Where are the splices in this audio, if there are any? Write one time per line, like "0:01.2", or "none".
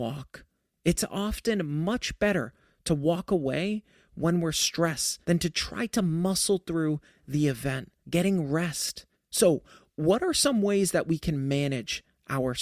0:05.2
0:08.0
0:09.1